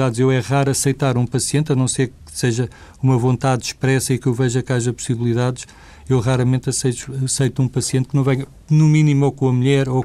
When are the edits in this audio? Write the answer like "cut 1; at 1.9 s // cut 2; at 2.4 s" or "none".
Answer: none